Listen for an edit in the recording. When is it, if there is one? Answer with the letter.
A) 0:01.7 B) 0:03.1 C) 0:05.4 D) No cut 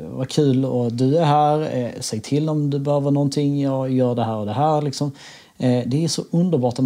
D